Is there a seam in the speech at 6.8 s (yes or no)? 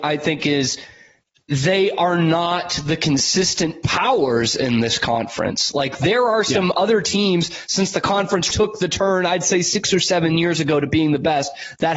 no